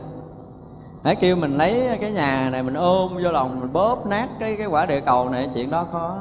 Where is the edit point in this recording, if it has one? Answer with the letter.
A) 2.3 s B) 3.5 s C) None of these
B